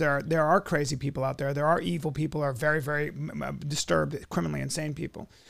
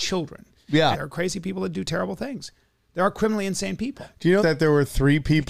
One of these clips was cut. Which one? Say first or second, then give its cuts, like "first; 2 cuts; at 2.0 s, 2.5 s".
second; 2 cuts; at 0.9 s, 4.4 s